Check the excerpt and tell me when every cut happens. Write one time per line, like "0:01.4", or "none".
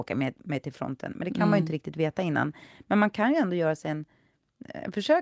none

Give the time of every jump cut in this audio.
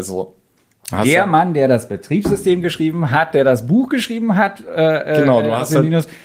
none

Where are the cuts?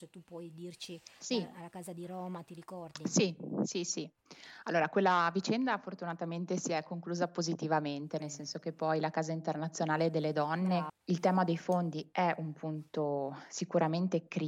0:10.9

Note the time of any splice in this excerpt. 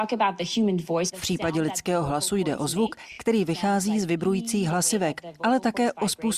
none

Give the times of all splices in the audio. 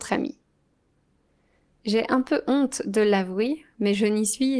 none

